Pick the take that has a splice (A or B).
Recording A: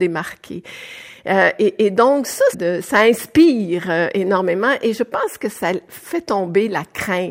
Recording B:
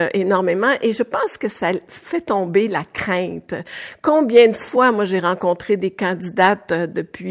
A